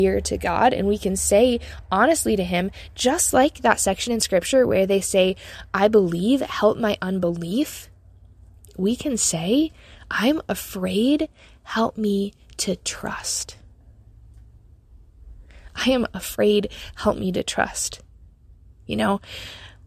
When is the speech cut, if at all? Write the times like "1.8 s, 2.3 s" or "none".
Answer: none